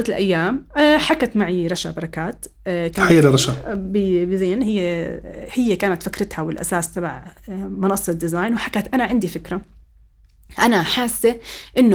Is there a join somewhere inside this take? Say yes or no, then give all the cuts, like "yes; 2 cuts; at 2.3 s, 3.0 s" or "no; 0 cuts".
no; 0 cuts